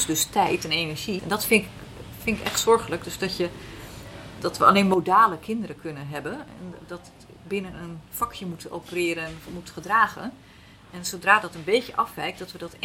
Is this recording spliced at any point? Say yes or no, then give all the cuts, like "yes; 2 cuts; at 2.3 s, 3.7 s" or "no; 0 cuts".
yes; 1 cut; at 1.2 s